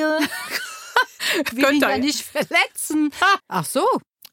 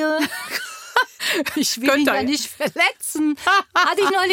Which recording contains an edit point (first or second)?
first